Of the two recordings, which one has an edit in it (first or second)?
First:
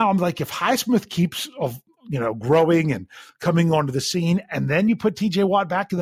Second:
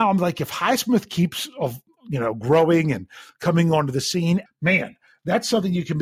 second